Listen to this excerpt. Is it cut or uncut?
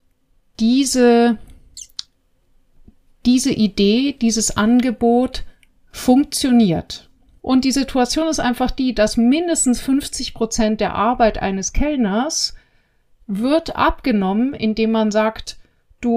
cut